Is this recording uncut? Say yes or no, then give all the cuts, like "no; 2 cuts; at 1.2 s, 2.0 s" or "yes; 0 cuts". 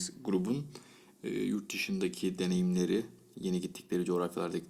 yes; 0 cuts